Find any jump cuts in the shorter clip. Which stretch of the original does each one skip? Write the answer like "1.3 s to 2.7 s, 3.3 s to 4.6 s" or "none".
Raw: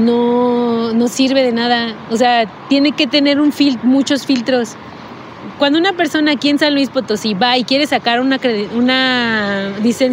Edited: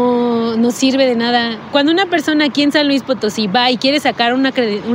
2.1 s to 5.6 s